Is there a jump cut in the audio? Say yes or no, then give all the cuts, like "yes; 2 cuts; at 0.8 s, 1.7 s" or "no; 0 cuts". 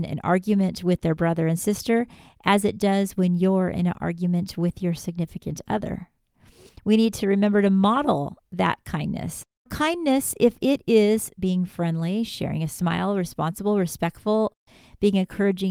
yes; 1 cut; at 9.7 s